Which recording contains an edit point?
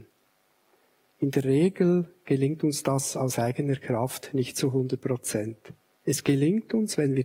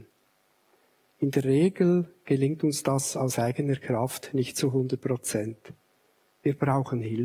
first; 1 cut; at 6.0 s

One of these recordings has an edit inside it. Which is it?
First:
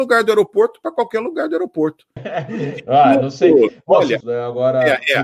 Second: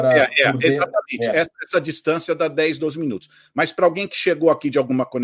first; 2 cuts; at 2.2 s, 4.2 s

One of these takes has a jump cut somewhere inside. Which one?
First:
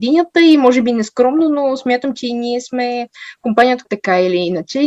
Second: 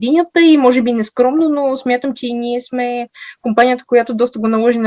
first; 1 cut; at 3.8 s

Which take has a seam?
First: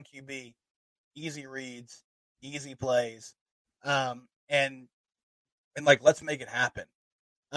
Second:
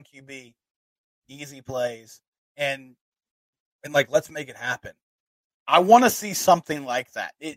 second; 3 cuts; at 1.1 s, 2.5 s, 5.5 s

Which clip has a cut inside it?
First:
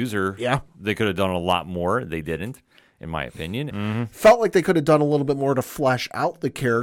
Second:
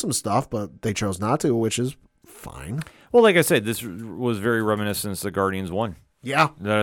first; 1 cut; at 3.7 s

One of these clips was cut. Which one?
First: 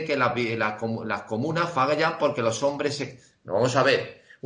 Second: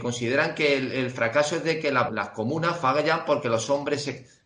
second; 1 cut; at 2.1 s

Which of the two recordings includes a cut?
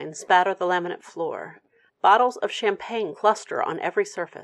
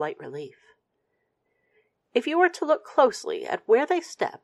first; 1 cut; at 1.9 s

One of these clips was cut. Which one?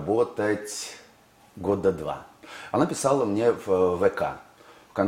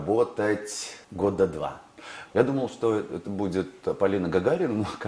second; 2 cuts; at 1.0 s, 2.3 s

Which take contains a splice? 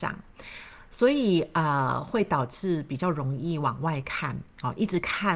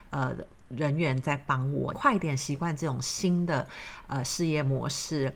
second; 1 cut; at 1.9 s

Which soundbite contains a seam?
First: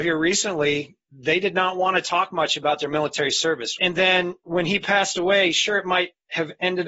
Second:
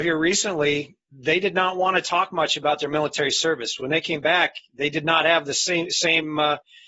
first; 1 cut; at 3.8 s

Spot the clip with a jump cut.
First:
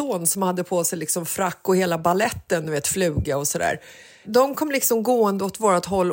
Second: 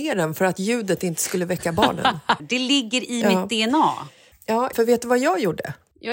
second; 2 cuts; at 2.4 s, 4.7 s

